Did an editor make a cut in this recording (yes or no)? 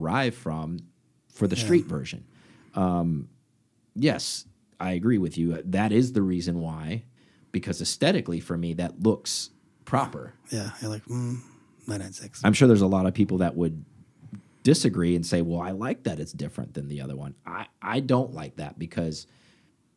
no